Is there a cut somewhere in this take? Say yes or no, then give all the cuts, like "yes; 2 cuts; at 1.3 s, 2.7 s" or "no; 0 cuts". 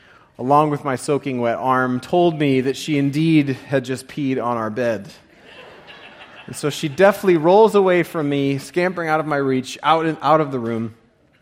no; 0 cuts